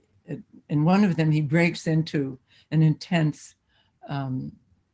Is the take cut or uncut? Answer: uncut